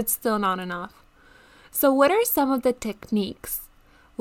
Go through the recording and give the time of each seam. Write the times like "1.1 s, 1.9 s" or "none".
none